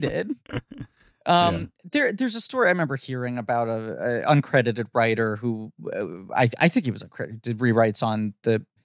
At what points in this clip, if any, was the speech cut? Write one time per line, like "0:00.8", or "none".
none